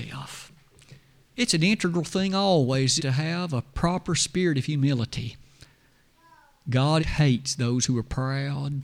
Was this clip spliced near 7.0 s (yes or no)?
yes